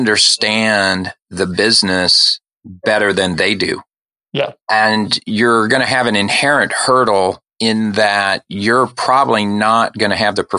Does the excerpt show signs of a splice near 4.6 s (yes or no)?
yes